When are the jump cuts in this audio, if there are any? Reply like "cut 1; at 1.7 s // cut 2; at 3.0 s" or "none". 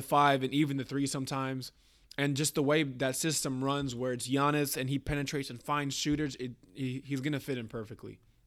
none